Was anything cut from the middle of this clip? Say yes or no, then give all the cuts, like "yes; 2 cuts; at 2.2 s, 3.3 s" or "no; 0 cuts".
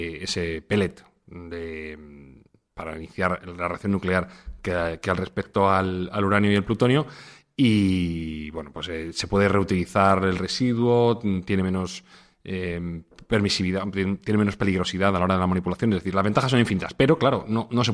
no; 0 cuts